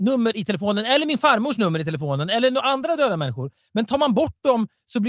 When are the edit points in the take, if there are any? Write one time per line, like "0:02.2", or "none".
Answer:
none